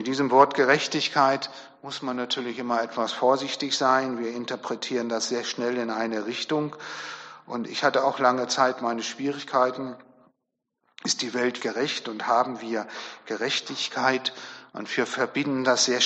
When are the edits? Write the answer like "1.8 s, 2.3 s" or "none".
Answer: 11.6 s